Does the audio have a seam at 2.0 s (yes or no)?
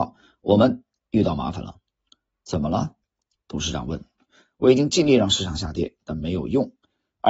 no